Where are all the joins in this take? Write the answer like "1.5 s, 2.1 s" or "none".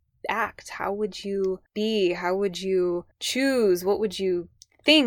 none